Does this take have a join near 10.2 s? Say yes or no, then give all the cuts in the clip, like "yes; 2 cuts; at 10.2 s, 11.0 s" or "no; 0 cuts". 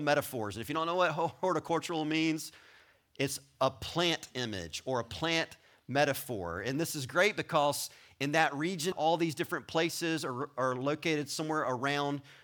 no; 1 cut; at 8.9 s